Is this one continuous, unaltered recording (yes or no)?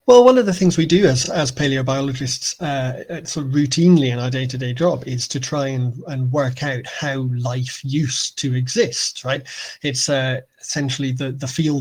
yes